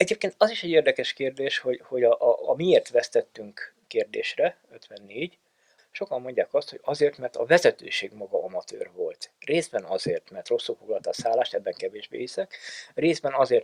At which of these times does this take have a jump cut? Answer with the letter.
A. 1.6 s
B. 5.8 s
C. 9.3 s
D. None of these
B